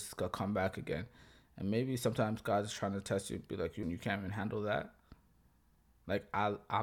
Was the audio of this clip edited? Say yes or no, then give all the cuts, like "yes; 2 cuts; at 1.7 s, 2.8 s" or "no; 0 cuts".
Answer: yes; 1 cut; at 3.8 s